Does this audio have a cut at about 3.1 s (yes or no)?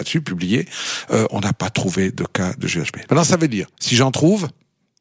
yes